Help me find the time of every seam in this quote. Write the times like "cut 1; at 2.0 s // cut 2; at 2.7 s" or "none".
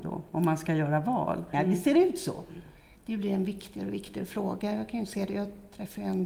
cut 1; at 1.5 s // cut 2; at 3.0 s